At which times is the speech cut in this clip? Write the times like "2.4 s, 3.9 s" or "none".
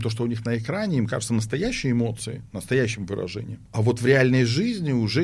3.6 s